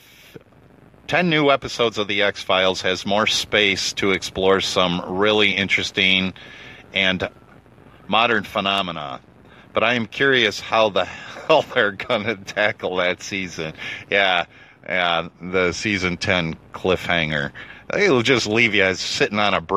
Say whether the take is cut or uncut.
uncut